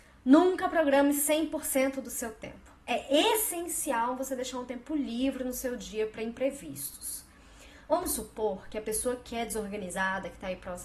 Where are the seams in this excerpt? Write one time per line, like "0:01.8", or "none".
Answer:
none